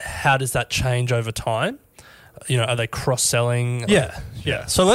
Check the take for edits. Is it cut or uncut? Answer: cut